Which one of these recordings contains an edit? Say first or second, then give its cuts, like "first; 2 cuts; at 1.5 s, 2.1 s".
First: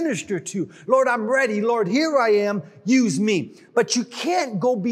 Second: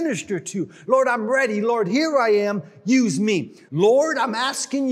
second; 1 cut; at 3.7 s